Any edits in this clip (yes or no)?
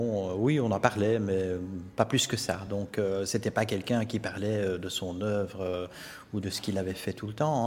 no